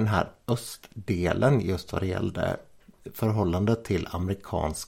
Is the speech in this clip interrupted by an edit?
no; 0 cuts

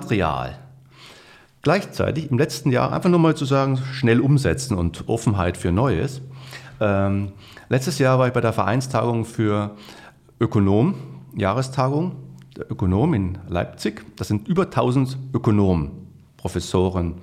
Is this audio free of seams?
no; 1 cut; at 16.3 s

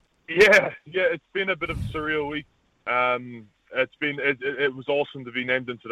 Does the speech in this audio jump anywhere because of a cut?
no; 0 cuts

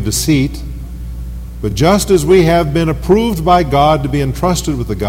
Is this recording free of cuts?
yes; 0 cuts

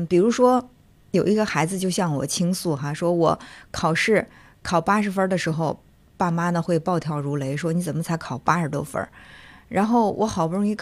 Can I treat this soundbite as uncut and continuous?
yes; 0 cuts

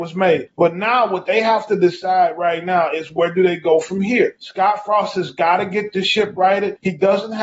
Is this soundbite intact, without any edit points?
yes; 0 cuts

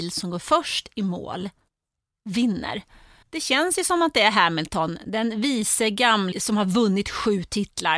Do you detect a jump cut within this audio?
yes; 2 cuts; at 3.2 s, 6.3 s

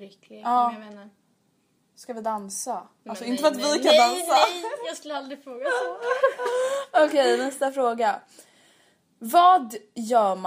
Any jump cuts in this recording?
no; 0 cuts

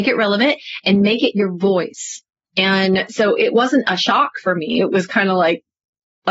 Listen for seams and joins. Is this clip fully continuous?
no; 1 cut; at 2.5 s

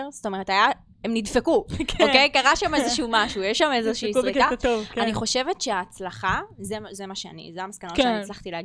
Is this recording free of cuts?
yes; 0 cuts

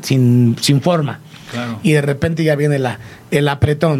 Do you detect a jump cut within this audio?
no; 0 cuts

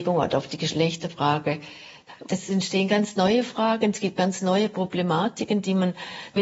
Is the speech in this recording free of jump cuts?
no; 1 cut; at 2.3 s

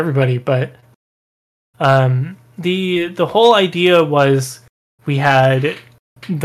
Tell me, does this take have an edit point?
no; 0 cuts

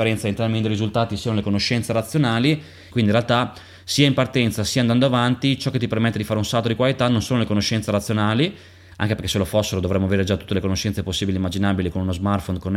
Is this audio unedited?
no; 1 cut; at 2.9 s

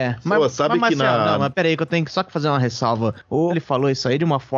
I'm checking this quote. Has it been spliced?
yes; 2 cuts; at 1.5 s, 3.5 s

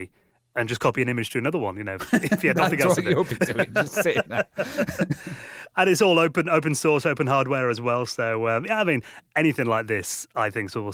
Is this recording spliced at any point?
no; 0 cuts

